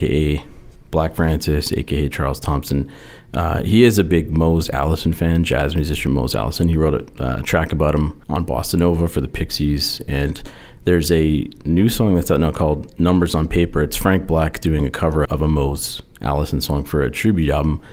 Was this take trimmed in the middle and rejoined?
yes; 2 cuts; at 8.2 s, 15.3 s

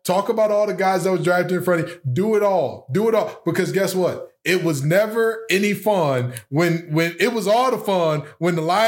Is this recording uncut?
yes; 0 cuts

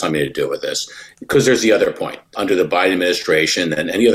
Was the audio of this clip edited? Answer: yes; 1 cut; at 2.3 s

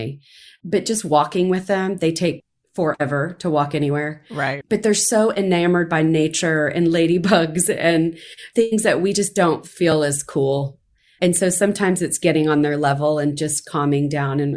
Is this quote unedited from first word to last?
yes; 0 cuts

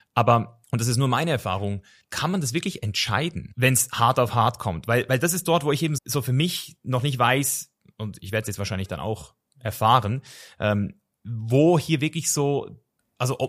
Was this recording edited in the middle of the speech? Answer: yes; 1 cut; at 6.0 s

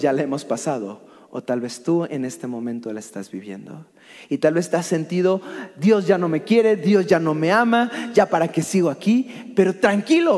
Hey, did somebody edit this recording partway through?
no; 0 cuts

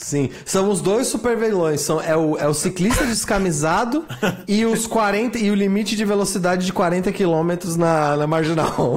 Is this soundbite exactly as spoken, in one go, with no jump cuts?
yes; 0 cuts

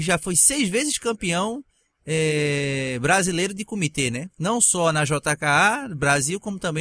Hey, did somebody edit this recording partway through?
no; 0 cuts

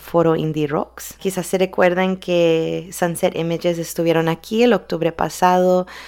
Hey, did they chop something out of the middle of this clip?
yes; 1 cut; at 1.2 s

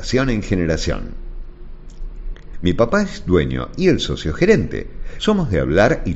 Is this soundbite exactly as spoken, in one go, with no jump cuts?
no; 2 cuts; at 2.5 s, 5.2 s

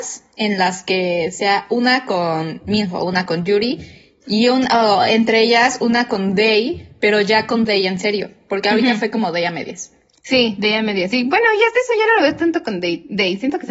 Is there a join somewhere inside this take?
no; 0 cuts

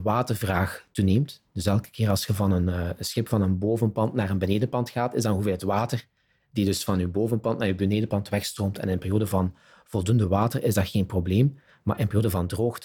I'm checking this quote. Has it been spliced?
no; 0 cuts

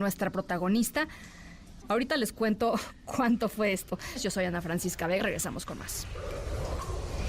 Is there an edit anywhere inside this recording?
yes; 2 cuts; at 1.8 s, 5.2 s

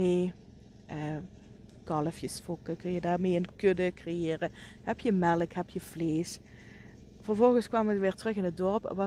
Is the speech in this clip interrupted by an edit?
no; 0 cuts

